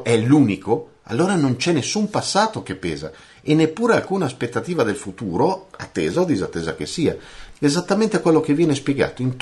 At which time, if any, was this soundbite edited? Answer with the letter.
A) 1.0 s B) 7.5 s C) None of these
B